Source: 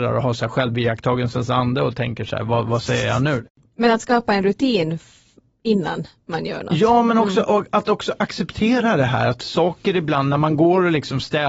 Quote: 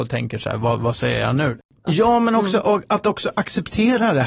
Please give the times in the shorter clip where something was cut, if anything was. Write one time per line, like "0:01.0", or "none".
0:01.8